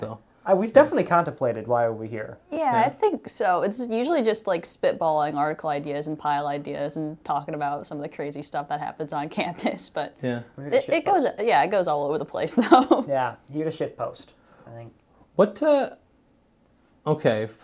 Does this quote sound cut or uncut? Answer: uncut